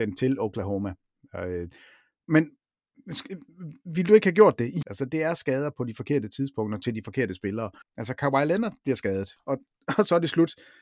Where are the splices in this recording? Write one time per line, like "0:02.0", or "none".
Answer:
0:04.8
0:07.8
0:09.4